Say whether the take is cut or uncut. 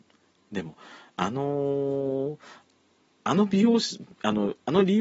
uncut